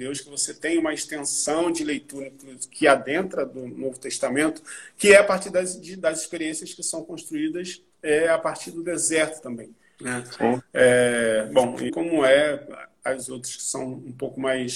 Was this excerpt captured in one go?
no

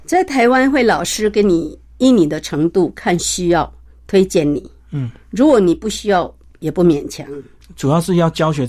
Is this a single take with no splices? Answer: yes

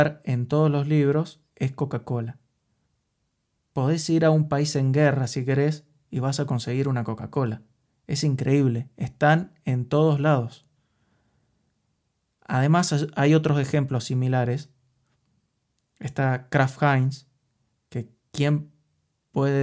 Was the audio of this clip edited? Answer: no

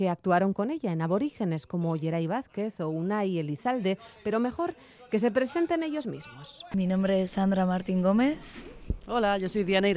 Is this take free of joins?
no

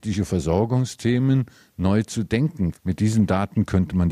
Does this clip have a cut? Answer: yes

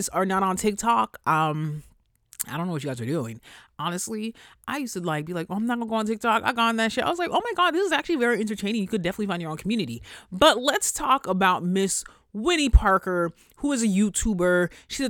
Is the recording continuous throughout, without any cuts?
yes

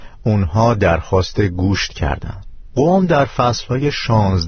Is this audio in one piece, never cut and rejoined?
no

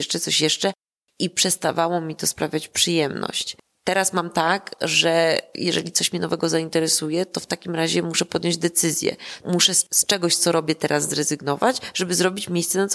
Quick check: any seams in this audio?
no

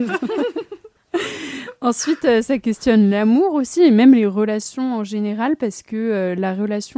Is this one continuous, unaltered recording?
yes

